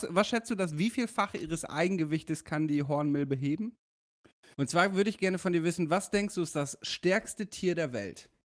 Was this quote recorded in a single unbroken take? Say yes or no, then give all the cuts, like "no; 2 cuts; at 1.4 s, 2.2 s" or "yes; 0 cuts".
no; 1 cut; at 4.5 s